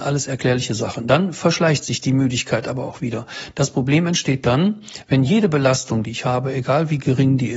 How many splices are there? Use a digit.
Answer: 0